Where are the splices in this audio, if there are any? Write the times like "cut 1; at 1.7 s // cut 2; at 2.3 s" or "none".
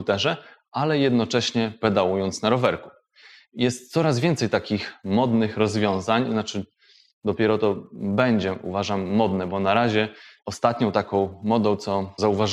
none